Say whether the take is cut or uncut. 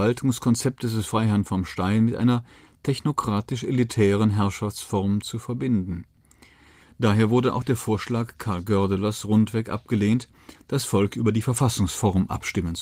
cut